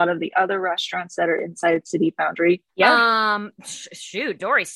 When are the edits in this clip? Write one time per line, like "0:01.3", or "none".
0:02.7